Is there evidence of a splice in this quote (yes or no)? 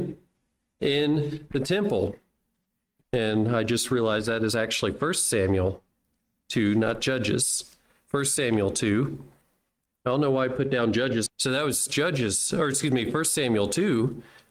yes